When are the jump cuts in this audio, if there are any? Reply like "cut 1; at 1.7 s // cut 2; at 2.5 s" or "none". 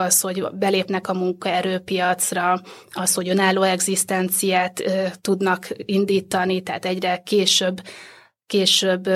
none